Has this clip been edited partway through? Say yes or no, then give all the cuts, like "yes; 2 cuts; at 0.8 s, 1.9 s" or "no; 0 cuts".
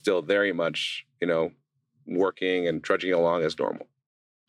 no; 0 cuts